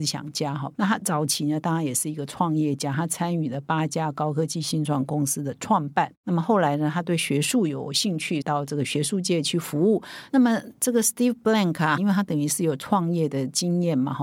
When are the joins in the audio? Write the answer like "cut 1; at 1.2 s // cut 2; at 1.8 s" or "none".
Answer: cut 1; at 8.4 s // cut 2; at 10.3 s // cut 3; at 12.0 s